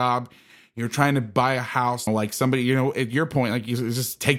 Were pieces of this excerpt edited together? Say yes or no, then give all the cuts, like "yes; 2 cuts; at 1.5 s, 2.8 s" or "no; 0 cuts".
yes; 1 cut; at 2.1 s